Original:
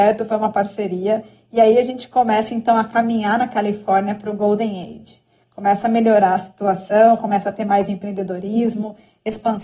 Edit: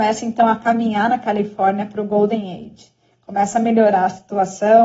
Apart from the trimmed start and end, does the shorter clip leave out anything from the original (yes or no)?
no